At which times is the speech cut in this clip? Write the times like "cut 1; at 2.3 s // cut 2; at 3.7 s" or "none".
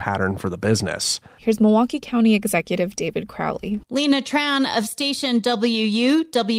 cut 1; at 1.4 s // cut 2; at 3.8 s

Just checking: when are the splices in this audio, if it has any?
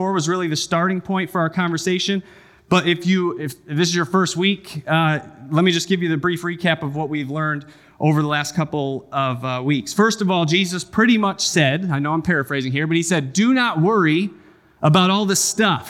none

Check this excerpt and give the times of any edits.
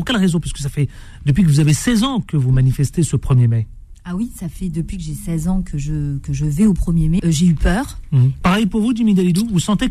cut 1; at 7.2 s // cut 2; at 8.4 s

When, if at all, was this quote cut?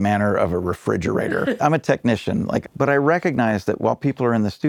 cut 1; at 1.6 s // cut 2; at 2.6 s

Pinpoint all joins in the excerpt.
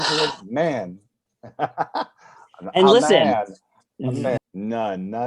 cut 1; at 4.4 s

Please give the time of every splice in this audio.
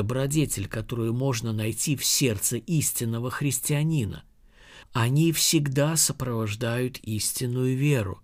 cut 1; at 4.8 s

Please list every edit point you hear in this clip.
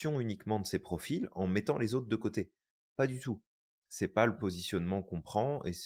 none

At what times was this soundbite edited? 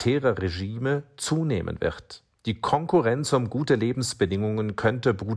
cut 1; at 2.3 s

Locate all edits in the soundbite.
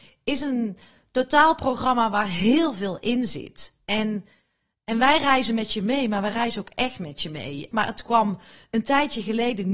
cut 1; at 7.7 s

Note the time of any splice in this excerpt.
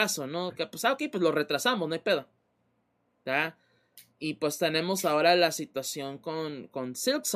none

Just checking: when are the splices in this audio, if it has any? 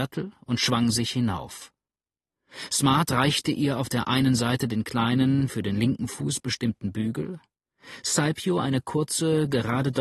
none

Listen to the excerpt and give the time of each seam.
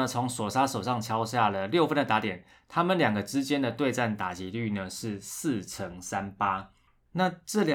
none

